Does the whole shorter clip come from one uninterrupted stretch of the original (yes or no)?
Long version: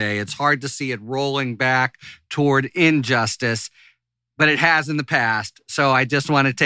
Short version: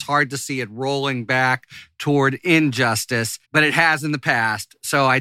no